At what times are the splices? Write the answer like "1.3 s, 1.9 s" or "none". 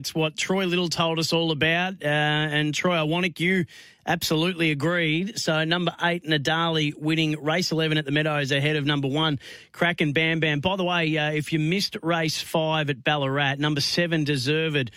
none